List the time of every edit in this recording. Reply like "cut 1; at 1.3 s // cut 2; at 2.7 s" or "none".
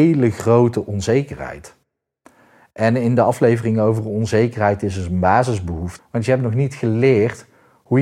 cut 1; at 6.0 s